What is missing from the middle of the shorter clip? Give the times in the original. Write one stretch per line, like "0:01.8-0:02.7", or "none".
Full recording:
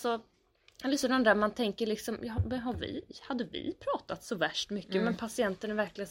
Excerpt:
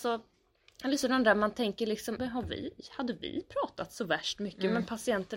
0:02.2-0:02.5